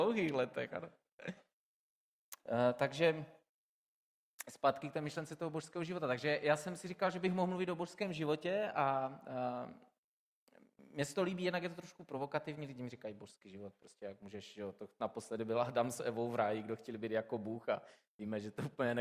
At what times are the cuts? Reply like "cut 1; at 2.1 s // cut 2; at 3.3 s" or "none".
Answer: none